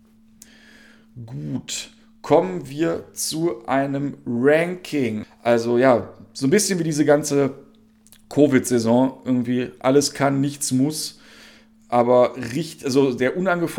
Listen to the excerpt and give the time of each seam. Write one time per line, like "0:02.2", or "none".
0:05.2